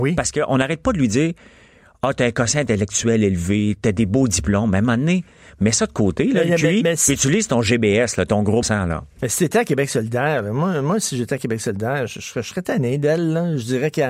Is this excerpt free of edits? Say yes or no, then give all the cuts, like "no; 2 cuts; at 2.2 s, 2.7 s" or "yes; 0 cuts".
no; 1 cut; at 8.6 s